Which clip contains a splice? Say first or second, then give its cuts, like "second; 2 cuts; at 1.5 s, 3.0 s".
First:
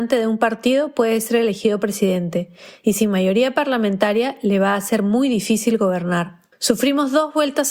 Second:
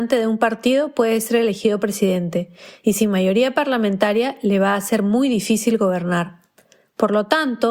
first; 1 cut; at 6.5 s